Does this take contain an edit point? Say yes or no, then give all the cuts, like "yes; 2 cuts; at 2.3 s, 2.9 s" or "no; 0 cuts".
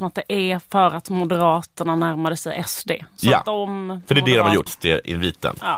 yes; 1 cut; at 4.7 s